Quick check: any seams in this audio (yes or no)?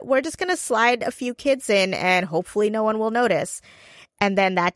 no